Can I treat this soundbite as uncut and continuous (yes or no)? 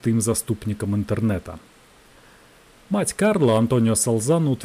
yes